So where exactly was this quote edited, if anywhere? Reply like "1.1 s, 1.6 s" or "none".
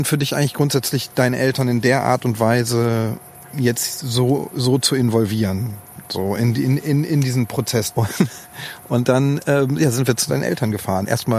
7.9 s